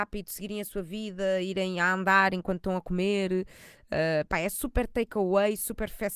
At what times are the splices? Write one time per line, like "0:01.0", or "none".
none